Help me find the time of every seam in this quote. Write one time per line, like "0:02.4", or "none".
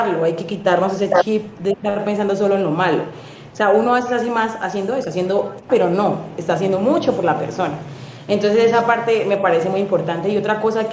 0:03.5
0:05.7